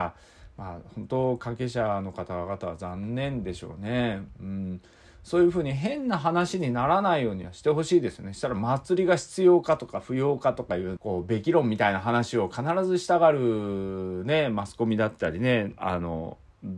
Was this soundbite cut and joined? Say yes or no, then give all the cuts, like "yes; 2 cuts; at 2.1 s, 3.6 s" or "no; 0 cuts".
yes; 2 cuts; at 11.0 s, 15.8 s